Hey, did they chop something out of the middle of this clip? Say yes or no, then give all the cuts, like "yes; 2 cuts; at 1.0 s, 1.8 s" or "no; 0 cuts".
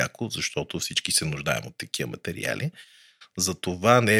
no; 0 cuts